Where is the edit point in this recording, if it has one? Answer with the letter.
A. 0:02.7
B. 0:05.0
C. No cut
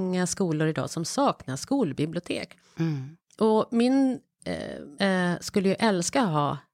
B